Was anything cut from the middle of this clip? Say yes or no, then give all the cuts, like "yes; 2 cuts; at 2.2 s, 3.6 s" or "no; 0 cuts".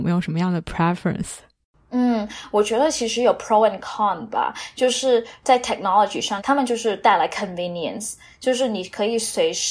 yes; 1 cut; at 6.4 s